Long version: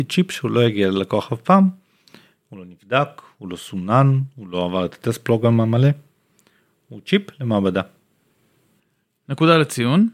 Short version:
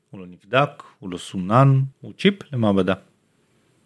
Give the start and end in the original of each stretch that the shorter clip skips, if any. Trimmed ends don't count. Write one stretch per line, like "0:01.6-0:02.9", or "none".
0:04.3-0:06.8

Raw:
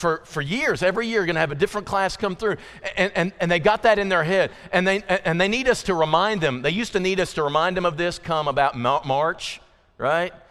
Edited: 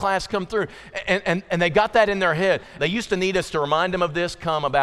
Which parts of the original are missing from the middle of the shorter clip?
0:04.7-0:06.6

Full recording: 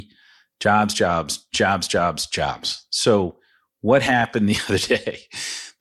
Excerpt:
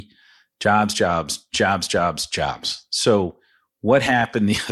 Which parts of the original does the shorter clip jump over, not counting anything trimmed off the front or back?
none

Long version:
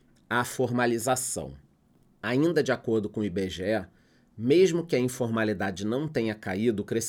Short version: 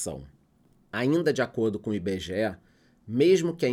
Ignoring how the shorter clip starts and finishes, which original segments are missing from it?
none

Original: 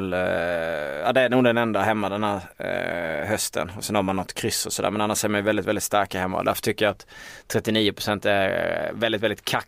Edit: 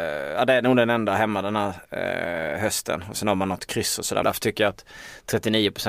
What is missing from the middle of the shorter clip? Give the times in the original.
0:04.9-0:06.4

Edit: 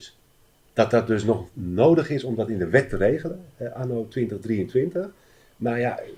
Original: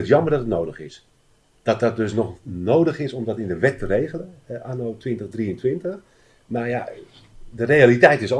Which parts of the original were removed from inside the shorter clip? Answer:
none

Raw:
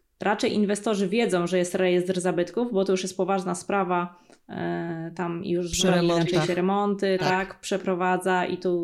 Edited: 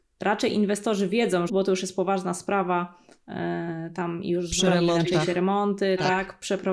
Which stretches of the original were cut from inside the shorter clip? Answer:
0:01.5-0:02.7

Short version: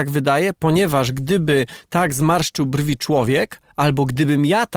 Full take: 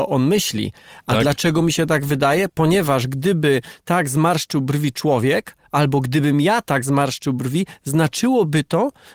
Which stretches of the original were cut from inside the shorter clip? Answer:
none

